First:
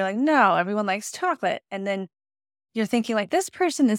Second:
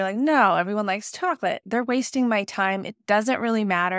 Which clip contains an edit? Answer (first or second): second